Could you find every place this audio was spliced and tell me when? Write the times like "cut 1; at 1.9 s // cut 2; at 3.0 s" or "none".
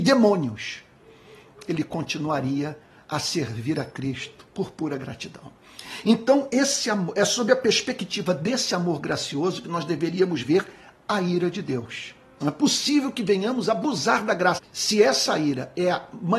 cut 1; at 12.4 s // cut 2; at 14.6 s